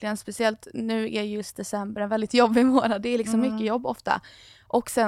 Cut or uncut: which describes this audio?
uncut